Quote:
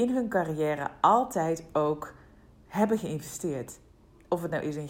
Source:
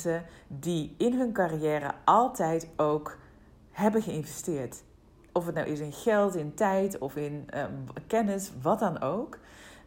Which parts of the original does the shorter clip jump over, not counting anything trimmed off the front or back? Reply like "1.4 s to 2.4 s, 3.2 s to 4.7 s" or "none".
none